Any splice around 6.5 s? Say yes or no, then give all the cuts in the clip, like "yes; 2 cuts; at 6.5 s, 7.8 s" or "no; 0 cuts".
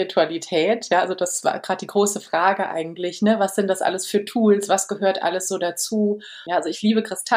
yes; 1 cut; at 6.5 s